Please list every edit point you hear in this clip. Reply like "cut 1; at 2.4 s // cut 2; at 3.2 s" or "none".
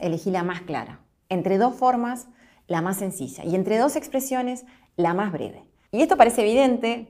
cut 1; at 5.9 s